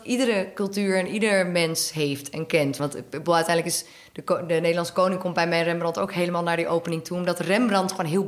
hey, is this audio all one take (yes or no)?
no